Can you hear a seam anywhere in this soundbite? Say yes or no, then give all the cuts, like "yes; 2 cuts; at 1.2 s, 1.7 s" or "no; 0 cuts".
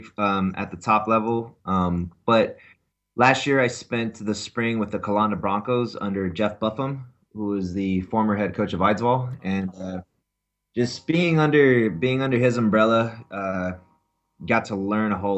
yes; 1 cut; at 1.6 s